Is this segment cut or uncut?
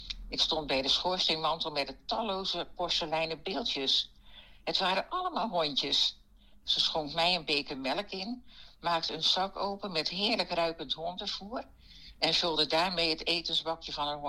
cut